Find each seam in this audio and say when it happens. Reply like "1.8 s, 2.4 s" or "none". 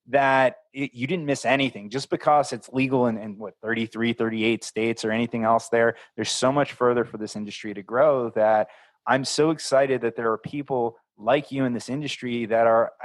none